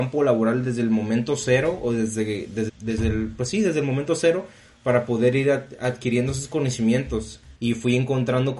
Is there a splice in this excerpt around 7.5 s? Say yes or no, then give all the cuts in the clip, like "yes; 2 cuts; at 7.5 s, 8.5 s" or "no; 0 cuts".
yes; 2 cuts; at 2.7 s, 7.5 s